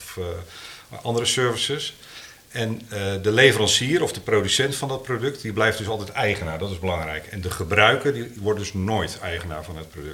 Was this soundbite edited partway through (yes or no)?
no